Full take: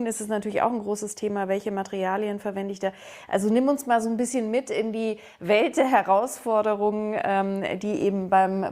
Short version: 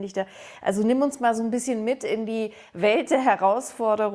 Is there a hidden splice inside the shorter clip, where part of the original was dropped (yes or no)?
no